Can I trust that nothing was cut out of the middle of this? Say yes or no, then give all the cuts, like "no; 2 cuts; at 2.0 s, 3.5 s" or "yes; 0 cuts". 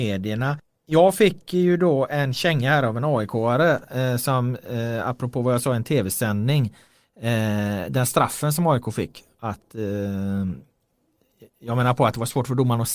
yes; 0 cuts